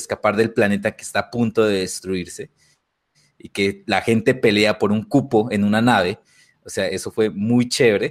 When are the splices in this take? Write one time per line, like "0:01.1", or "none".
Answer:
none